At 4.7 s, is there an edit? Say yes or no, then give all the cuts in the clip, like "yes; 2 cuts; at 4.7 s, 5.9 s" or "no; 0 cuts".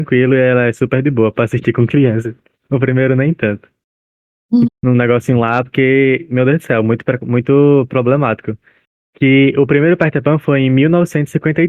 yes; 1 cut; at 4.7 s